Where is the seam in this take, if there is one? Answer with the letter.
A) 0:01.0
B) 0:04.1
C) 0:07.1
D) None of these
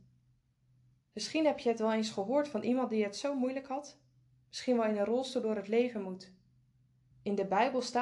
C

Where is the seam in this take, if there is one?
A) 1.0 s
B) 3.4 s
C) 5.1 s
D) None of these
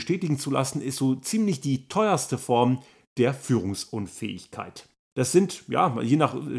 C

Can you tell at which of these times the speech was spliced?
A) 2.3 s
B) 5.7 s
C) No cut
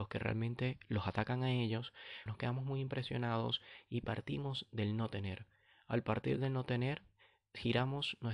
A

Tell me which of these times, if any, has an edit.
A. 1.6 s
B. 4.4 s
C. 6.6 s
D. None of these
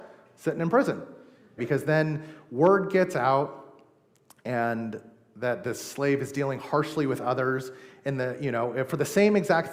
A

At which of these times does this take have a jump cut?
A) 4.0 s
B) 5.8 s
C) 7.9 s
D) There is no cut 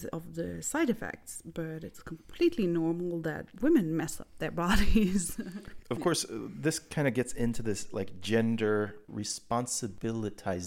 B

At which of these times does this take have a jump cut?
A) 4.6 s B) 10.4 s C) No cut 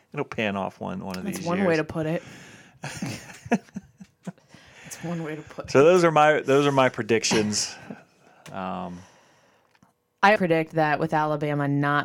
B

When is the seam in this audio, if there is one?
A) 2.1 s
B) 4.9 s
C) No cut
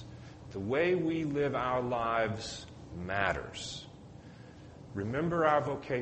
B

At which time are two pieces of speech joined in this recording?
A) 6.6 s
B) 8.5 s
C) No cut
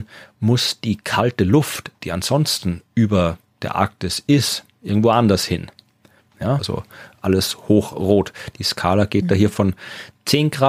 A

